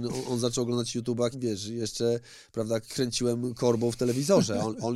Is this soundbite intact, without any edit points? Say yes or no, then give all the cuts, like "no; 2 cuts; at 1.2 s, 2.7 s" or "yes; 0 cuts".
no; 1 cut; at 1.3 s